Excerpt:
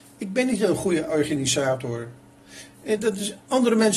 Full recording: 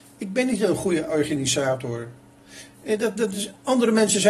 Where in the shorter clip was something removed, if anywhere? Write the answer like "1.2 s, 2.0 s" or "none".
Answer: 3.0 s